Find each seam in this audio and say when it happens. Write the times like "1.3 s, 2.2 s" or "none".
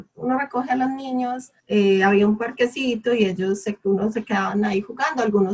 1.6 s